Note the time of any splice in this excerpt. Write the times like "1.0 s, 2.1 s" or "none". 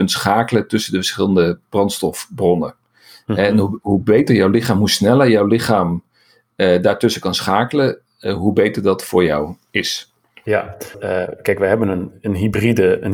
10.9 s